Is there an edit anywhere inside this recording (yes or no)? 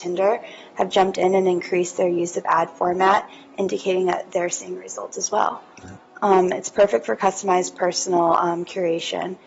no